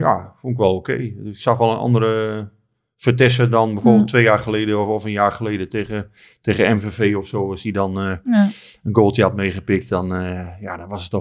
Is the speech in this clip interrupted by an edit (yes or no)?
no